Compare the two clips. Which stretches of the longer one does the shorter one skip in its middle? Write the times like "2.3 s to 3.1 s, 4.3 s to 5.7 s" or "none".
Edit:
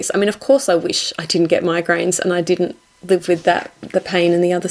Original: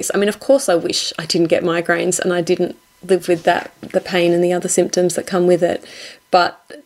none